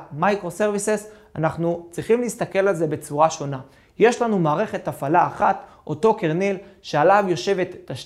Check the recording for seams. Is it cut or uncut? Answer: uncut